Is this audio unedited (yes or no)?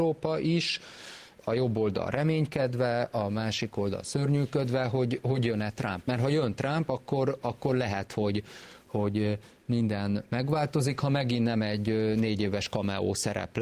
yes